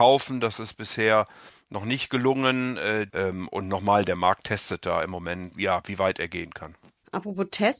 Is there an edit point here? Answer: yes; 1 cut; at 3.1 s

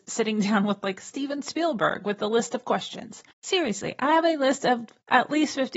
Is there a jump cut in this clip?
yes; 1 cut; at 3.3 s

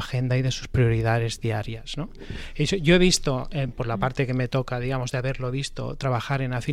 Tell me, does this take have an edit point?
no; 0 cuts

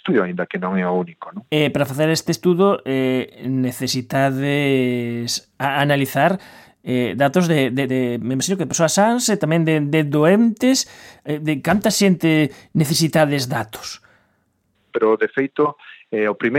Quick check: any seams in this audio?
yes; 2 cuts; at 7.9 s, 14.9 s

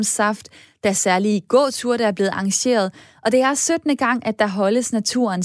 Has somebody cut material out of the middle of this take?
no; 0 cuts

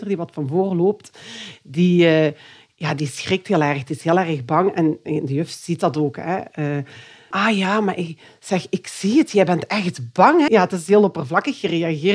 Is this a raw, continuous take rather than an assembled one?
no; 2 cuts; at 7.3 s, 10.5 s

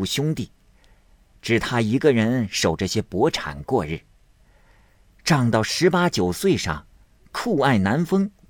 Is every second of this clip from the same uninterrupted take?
yes; 0 cuts

